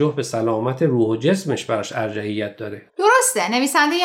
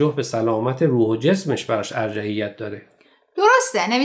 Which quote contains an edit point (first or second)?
first